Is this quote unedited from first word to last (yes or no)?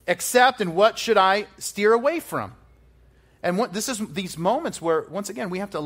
yes